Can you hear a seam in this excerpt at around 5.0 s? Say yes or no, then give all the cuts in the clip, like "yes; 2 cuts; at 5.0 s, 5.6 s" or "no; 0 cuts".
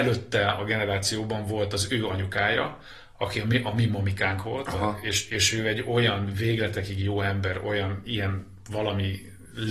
no; 1 cut; at 8.0 s